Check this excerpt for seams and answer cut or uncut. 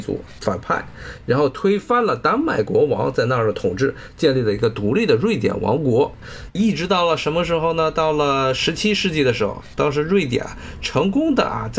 cut